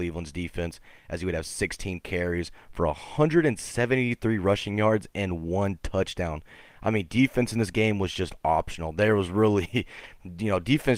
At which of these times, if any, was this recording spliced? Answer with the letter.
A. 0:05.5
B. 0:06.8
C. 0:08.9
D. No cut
D